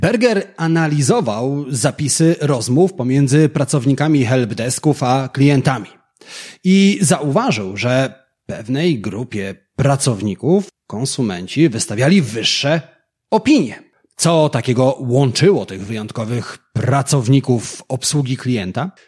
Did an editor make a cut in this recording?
yes; 1 cut; at 14.1 s

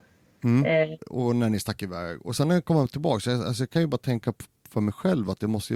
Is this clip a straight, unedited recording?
no; 1 cut; at 1.0 s

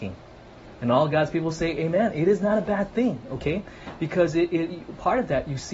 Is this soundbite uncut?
yes; 0 cuts

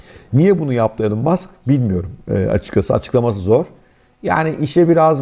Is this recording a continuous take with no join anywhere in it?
yes; 0 cuts

